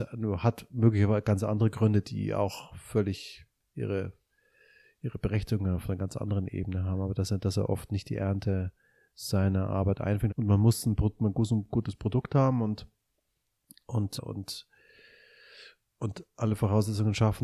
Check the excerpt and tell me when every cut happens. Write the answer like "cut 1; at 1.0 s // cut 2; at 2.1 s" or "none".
cut 1; at 10.3 s // cut 2; at 14.2 s